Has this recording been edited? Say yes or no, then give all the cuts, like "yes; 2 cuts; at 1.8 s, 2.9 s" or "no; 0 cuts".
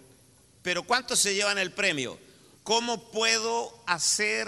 yes; 1 cut; at 2.5 s